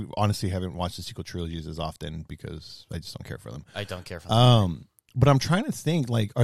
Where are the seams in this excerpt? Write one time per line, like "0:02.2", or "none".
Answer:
none